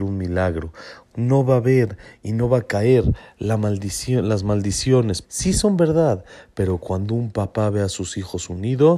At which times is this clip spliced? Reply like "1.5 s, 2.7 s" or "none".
1.1 s, 5.2 s